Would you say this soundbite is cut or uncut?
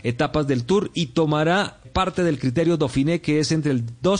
cut